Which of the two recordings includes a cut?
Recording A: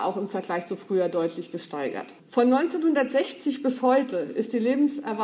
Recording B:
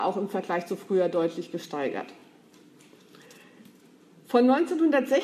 A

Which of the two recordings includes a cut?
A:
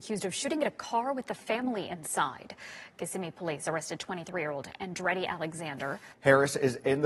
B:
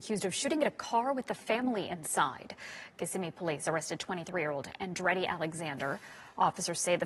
A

